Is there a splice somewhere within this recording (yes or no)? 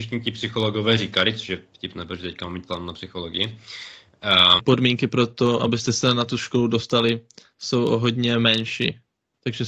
yes